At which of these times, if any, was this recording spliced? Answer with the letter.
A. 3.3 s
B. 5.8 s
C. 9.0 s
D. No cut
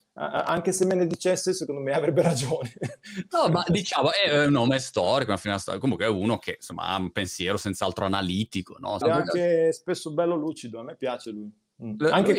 C